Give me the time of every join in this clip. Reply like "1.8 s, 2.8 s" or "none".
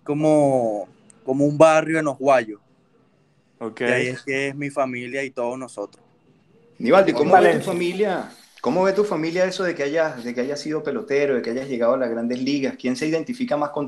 none